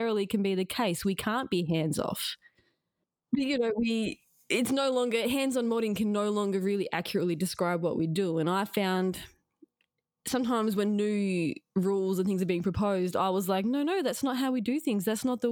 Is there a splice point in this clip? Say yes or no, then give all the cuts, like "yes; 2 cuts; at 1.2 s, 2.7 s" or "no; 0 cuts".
no; 0 cuts